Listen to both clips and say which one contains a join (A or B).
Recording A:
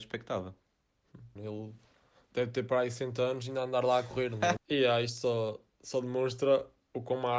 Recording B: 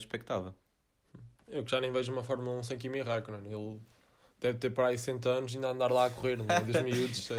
A